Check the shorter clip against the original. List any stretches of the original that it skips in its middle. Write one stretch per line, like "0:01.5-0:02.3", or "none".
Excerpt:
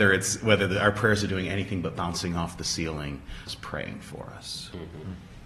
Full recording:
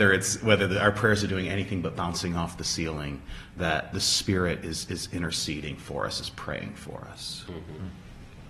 0:03.5-0:06.2